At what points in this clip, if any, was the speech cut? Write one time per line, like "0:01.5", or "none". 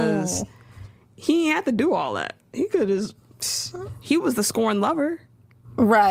none